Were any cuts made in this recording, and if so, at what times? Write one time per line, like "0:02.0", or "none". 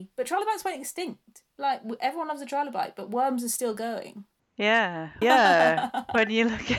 0:01.5
0:05.2